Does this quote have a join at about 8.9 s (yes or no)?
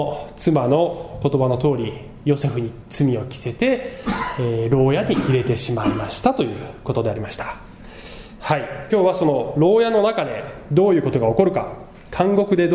yes